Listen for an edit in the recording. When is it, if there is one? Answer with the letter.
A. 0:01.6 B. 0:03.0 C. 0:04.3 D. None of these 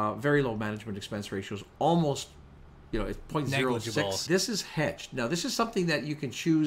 C